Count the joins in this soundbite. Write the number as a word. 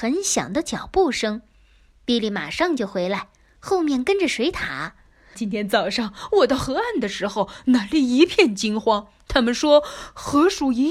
one